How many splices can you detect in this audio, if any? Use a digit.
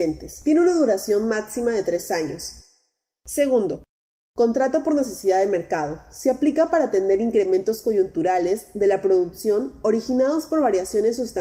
0